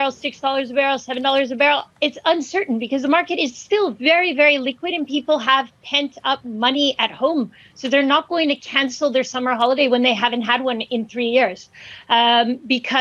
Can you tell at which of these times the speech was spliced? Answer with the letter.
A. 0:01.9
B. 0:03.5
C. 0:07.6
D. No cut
A